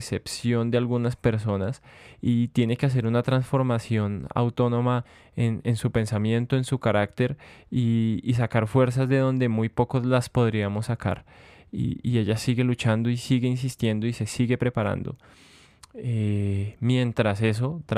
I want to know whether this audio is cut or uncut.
uncut